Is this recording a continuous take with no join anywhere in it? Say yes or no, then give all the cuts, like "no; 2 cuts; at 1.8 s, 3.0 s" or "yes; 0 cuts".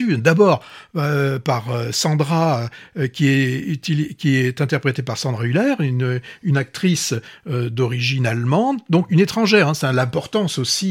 yes; 0 cuts